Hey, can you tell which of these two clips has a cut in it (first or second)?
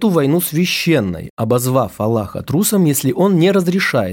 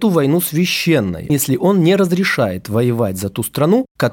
second